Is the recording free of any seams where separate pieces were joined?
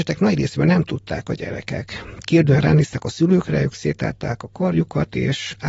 yes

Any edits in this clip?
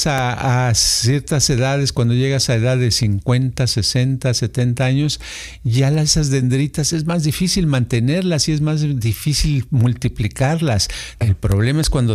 yes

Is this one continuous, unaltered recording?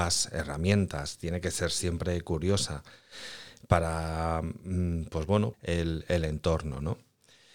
no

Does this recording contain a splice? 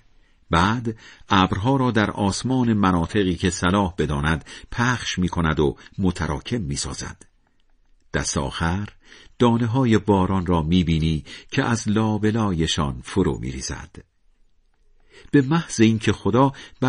no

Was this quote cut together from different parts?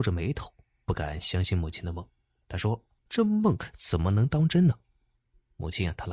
no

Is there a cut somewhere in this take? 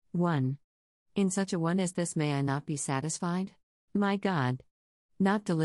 yes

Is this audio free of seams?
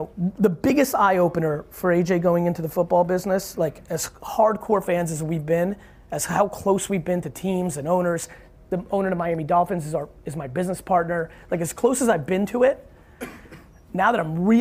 yes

